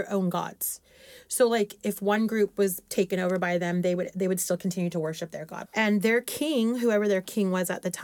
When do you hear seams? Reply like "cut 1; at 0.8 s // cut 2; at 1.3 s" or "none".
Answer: cut 1; at 5.7 s